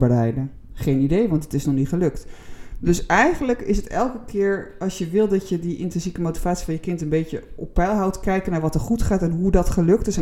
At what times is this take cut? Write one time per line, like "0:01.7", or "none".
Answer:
none